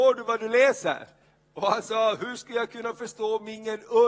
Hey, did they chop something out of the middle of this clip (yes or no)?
no